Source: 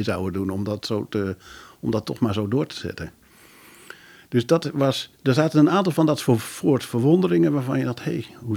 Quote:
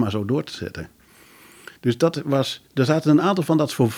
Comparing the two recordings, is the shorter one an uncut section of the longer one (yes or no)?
no